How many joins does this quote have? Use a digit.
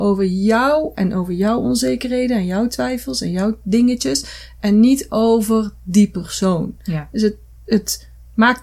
0